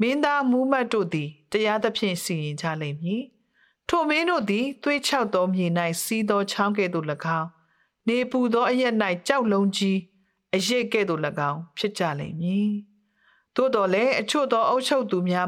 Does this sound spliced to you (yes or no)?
no